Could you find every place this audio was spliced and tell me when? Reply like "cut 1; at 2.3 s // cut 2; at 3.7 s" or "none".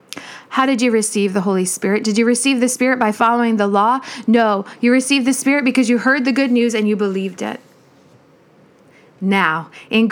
none